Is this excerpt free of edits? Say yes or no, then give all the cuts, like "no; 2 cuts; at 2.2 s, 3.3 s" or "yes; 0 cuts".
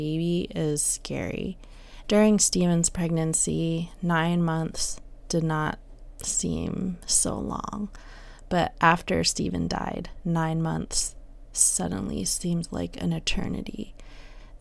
no; 1 cut; at 2.0 s